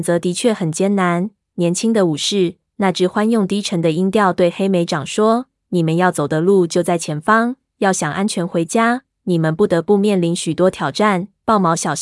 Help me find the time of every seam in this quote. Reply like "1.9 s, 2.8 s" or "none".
none